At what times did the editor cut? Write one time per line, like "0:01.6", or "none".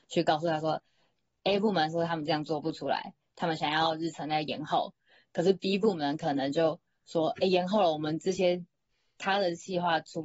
none